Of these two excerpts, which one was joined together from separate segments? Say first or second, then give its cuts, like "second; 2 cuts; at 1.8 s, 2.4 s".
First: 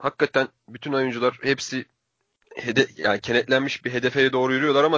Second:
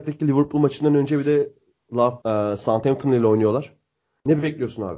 second; 1 cut; at 2.2 s